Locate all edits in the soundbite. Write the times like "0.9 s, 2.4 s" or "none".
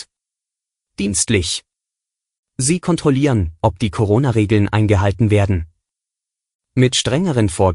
none